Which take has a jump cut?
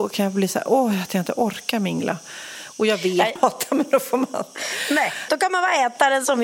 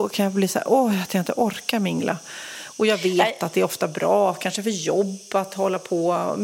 first; 1 cut; at 3.4 s

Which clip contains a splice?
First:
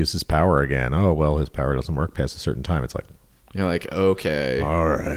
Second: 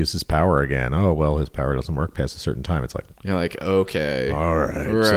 second; 1 cut; at 3.1 s

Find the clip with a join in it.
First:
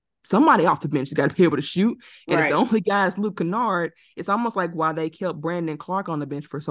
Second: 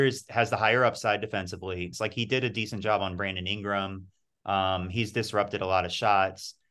second; 1 cut; at 1.9 s

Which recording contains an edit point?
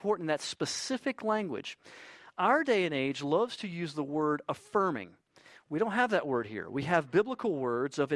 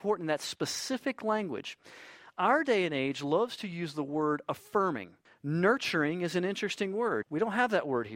second; 2 cuts; at 5.2 s, 7.2 s

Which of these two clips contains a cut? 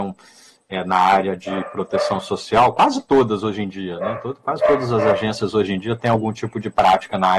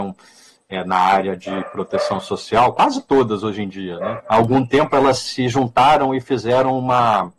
second; 1 cut; at 4.2 s

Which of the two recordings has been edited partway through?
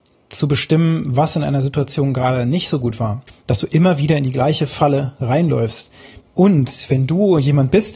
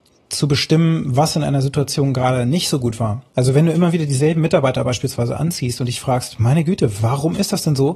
first; 2 cuts; at 3.3 s, 6.2 s

